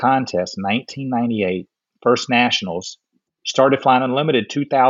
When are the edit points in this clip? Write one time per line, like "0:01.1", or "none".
0:03.3